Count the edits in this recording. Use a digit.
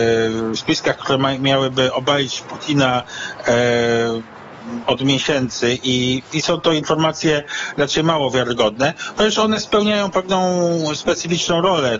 1